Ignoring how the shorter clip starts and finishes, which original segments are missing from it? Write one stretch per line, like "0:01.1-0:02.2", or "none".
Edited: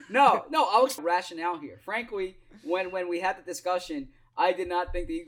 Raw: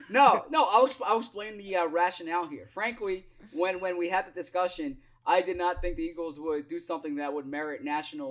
0:01.0-0:01.9